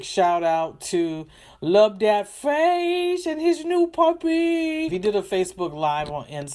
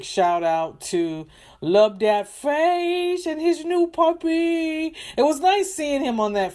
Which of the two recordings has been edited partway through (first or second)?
first